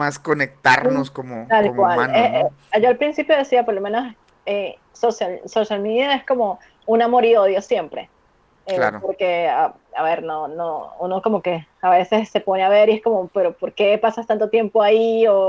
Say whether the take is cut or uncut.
uncut